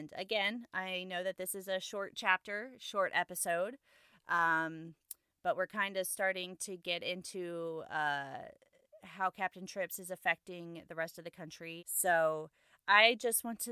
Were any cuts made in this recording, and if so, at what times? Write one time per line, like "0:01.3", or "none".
0:11.8